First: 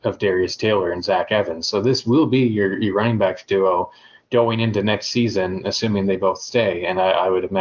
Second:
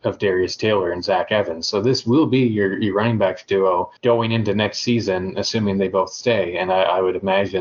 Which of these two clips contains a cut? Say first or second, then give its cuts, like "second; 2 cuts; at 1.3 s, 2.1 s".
second; 1 cut; at 4.0 s